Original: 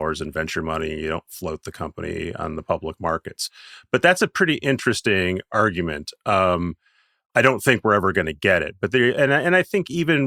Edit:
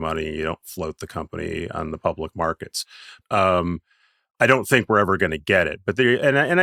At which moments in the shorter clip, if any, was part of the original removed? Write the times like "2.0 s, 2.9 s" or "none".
3.2 s